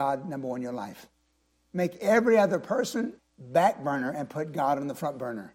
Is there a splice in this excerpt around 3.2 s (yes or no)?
yes